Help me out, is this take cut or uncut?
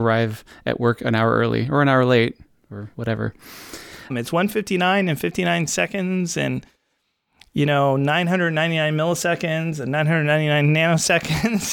cut